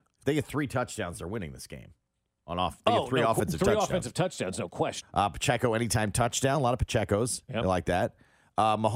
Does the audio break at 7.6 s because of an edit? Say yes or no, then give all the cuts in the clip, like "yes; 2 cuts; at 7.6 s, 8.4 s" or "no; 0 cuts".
no; 1 cut; at 5.0 s